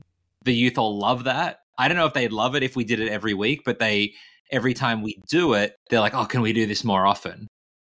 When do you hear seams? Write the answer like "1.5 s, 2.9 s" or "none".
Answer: 5.8 s